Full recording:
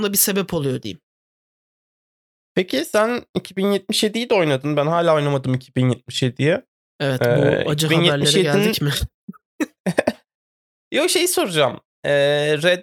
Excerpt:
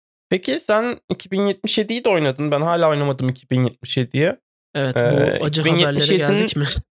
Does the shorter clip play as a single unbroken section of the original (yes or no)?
yes